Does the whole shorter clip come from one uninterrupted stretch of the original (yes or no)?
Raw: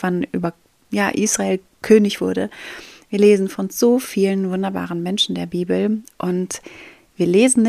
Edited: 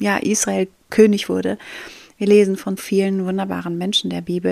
no